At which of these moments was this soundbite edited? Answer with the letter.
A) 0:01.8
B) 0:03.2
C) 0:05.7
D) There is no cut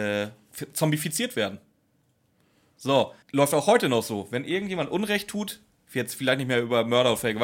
B